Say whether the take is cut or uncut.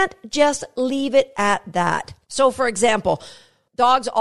cut